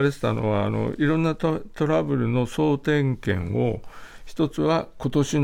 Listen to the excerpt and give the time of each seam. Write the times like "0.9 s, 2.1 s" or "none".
none